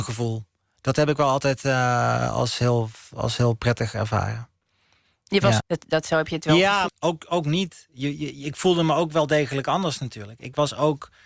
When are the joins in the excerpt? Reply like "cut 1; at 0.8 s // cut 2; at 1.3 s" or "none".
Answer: cut 1; at 5.6 s // cut 2; at 6.9 s